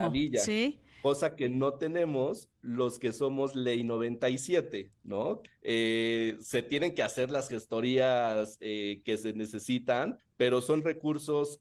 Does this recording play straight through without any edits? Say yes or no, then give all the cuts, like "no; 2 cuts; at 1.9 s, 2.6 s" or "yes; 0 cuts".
no; 2 cuts; at 5.5 s, 10.2 s